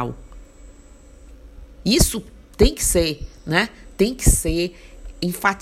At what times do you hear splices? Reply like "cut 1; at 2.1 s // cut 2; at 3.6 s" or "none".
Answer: none